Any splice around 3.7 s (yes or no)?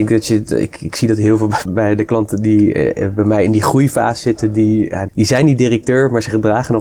no